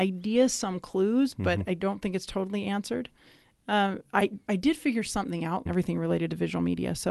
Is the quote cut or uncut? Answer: cut